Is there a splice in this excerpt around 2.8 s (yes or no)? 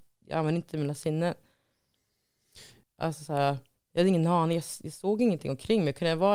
yes